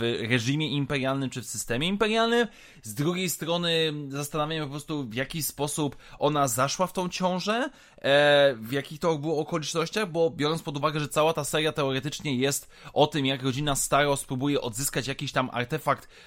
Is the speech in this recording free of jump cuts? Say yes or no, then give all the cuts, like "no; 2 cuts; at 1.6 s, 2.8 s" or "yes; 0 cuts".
yes; 0 cuts